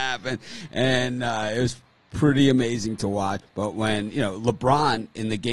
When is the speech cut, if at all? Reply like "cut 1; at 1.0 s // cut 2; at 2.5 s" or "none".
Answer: cut 1; at 3.4 s